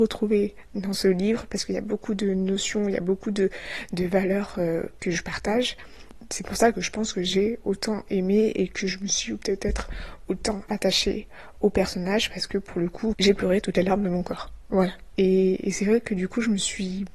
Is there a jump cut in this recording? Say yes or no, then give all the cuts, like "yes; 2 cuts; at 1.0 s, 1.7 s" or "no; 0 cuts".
yes; 2 cuts; at 13.1 s, 15.1 s